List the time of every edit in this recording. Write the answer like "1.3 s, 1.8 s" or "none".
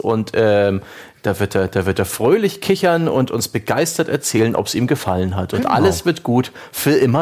none